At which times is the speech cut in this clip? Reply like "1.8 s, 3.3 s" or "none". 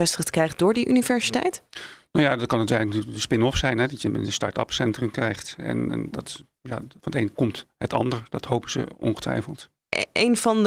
none